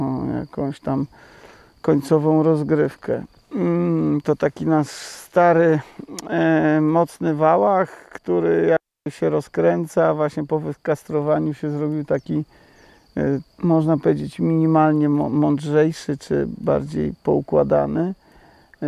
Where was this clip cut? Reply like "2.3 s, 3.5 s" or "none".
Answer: 4.2 s, 13.5 s

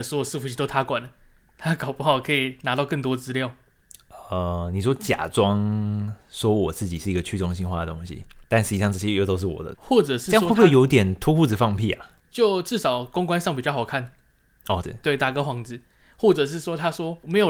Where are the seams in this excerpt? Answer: 9.7 s, 14.8 s

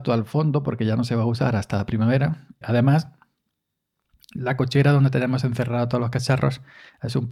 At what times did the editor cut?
2.6 s

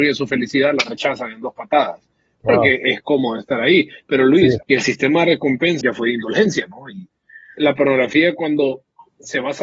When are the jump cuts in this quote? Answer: 4.6 s, 5.8 s, 7.6 s

